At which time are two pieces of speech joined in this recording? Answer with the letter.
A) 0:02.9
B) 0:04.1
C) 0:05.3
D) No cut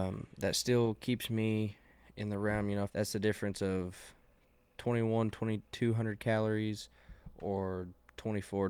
A